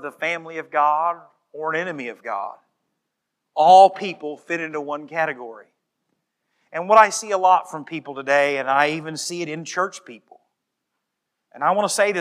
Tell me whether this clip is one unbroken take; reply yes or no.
yes